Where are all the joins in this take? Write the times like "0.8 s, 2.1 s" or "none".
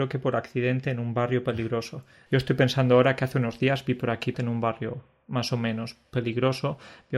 2.3 s, 4.3 s